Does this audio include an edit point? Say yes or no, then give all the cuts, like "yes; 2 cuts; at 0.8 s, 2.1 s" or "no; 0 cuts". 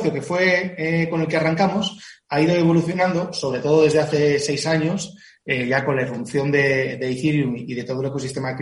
no; 0 cuts